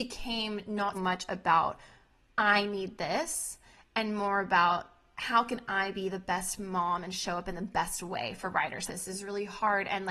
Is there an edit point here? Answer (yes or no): yes